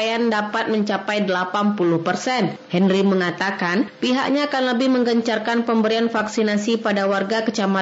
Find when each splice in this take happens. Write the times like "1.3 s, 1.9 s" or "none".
2.7 s